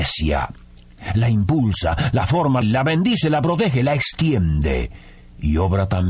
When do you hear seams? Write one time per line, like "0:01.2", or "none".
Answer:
0:02.6

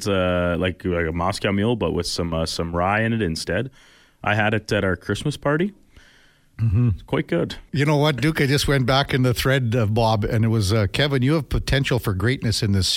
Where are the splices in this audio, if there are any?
0:07.7

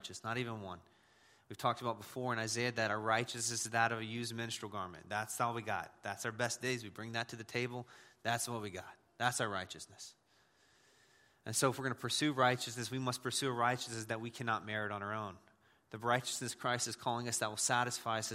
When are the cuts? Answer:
none

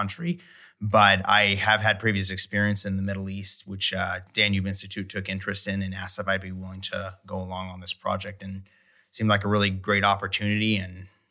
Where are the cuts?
none

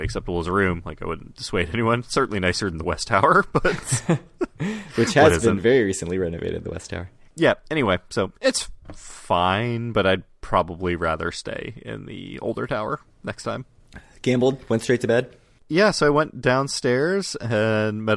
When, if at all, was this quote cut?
none

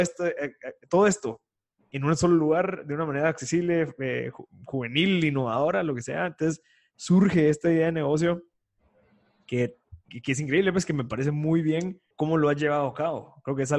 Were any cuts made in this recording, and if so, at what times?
0:10.1
0:12.1

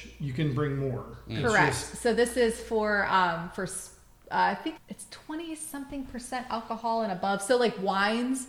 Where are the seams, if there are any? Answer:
0:04.8

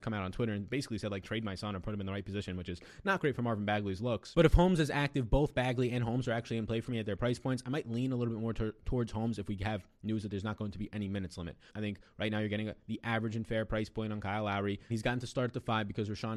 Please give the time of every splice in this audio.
0:11.7
0:14.9

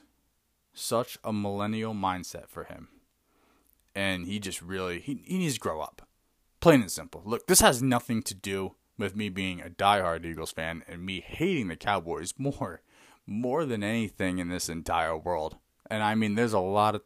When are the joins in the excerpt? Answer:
none

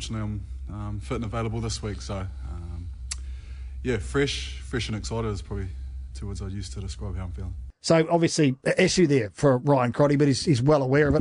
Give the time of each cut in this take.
none

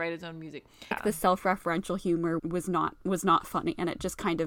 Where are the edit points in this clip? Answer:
0:00.9
0:02.4

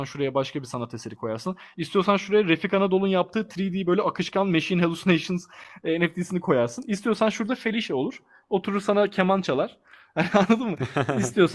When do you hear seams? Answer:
none

